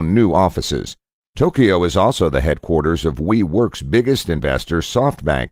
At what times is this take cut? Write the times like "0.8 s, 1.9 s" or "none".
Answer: 1.3 s